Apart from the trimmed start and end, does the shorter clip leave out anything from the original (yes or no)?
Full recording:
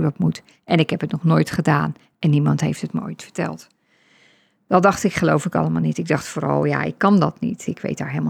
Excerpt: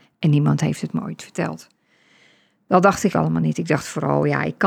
yes